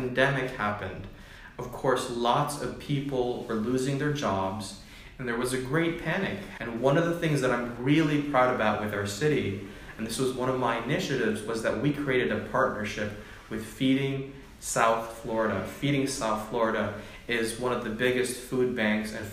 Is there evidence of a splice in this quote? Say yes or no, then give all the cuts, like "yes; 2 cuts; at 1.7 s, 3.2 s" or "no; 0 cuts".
yes; 1 cut; at 6.6 s